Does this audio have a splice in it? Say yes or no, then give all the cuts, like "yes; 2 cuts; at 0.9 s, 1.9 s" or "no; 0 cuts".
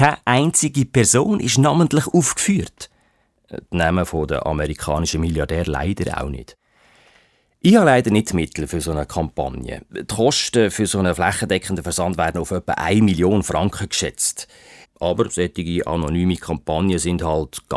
yes; 1 cut; at 14.8 s